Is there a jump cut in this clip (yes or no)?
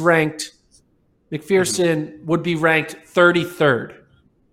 yes